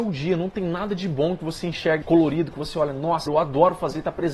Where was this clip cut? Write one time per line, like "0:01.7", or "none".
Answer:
0:02.0
0:03.3